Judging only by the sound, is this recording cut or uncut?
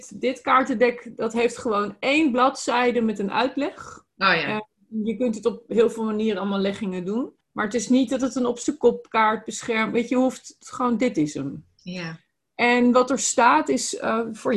cut